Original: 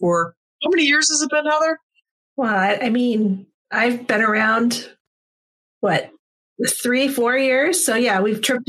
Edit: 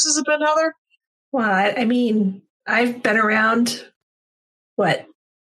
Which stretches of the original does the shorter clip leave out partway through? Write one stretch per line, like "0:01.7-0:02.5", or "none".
none